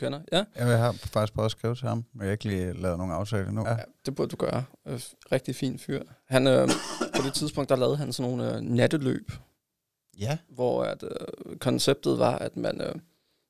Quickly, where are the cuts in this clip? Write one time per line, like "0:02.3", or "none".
0:03.6